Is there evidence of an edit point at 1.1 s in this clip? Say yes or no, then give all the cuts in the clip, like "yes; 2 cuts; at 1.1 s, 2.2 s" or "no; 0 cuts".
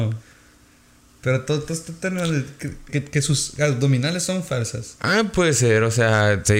no; 2 cuts; at 2.9 s, 5.0 s